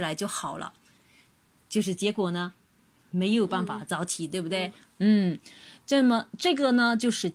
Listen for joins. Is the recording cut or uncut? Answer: uncut